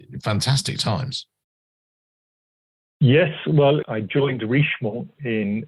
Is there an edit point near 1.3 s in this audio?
no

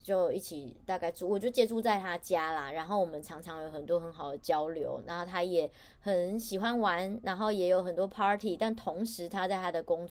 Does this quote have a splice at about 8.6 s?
no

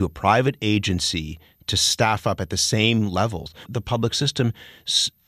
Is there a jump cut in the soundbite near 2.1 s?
no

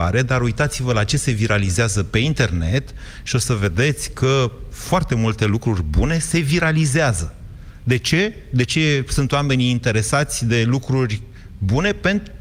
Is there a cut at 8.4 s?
no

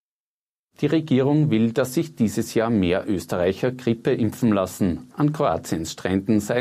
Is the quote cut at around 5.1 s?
yes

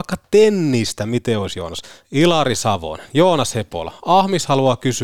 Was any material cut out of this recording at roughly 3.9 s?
no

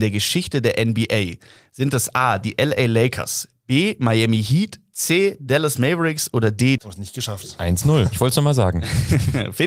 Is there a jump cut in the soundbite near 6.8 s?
yes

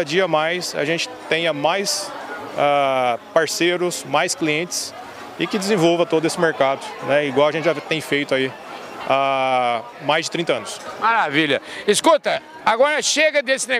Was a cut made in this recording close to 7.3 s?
no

